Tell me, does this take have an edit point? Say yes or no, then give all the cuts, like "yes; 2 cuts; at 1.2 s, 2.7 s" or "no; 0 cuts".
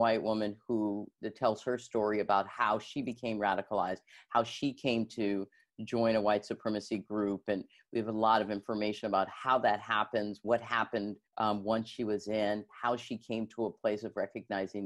yes; 2 cuts; at 11.3 s, 12.7 s